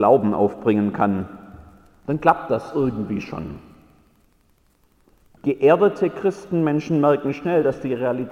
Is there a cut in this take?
yes; 1 cut; at 5.4 s

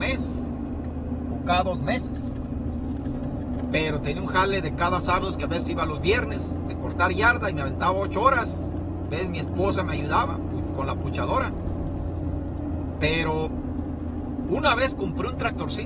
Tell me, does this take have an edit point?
no; 0 cuts

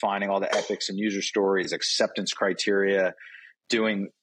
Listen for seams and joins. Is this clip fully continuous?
yes; 0 cuts

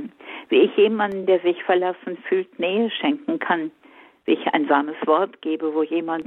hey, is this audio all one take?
yes; 0 cuts

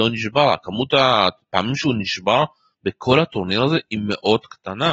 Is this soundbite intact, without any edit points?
yes; 0 cuts

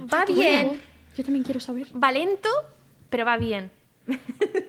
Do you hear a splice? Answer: no; 0 cuts

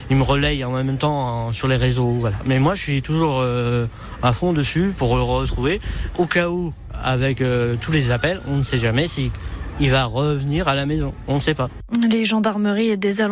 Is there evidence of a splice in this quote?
no; 0 cuts

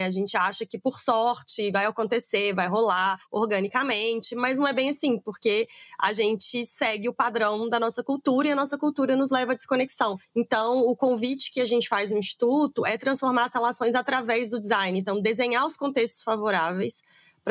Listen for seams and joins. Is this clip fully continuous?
yes; 0 cuts

